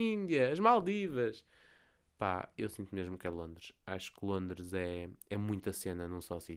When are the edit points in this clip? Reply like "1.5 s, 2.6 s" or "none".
none